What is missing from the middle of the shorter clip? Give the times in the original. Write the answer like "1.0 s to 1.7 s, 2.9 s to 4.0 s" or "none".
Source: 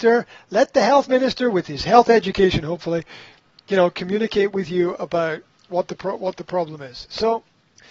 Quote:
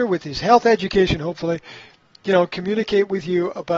none